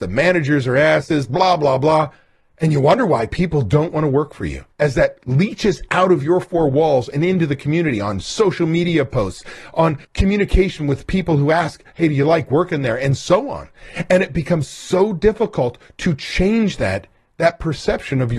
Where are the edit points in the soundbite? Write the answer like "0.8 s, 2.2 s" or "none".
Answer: 4.7 s, 10.0 s